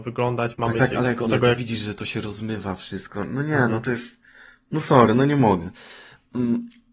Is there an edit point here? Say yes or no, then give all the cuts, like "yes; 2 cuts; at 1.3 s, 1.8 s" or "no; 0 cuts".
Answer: yes; 1 cut; at 1.3 s